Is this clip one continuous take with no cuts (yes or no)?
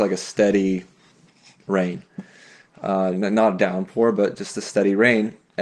yes